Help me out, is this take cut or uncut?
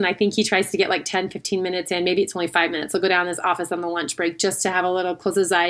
uncut